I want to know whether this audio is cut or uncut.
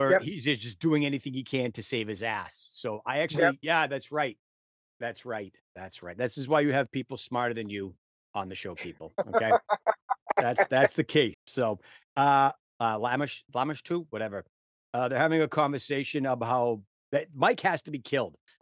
cut